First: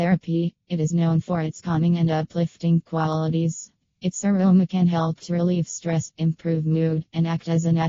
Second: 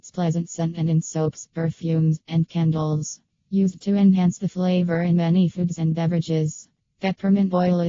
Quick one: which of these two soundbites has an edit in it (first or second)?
second